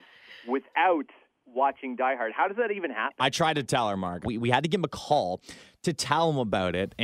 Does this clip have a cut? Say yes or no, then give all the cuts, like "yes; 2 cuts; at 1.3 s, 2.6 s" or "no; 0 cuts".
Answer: yes; 1 cut; at 4.2 s